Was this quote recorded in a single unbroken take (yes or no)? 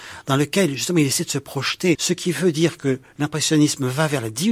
no